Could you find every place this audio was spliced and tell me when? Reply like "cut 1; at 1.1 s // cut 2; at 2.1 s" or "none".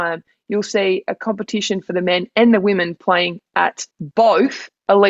cut 1; at 3.9 s